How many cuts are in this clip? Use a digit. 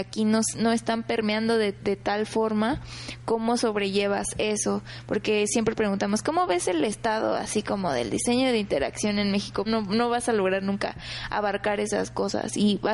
1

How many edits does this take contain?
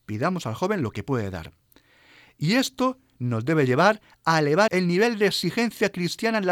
1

